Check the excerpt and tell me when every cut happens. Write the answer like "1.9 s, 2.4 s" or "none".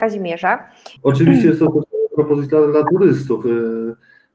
1.0 s